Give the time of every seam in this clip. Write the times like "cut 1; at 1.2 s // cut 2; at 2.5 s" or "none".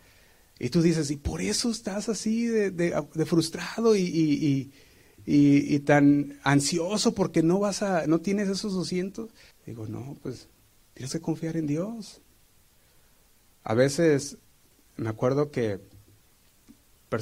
cut 1; at 9.5 s